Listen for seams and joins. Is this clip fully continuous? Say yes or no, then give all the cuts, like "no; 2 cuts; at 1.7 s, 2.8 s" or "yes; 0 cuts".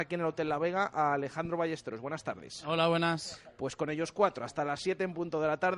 yes; 0 cuts